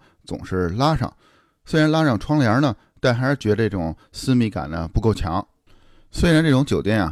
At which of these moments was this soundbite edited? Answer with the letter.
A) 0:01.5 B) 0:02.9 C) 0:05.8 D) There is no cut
D